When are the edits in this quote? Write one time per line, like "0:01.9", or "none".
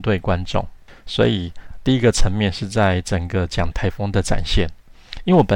0:03.7